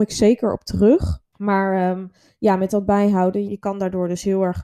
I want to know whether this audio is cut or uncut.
cut